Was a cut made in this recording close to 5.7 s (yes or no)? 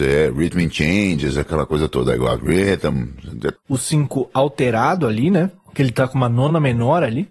no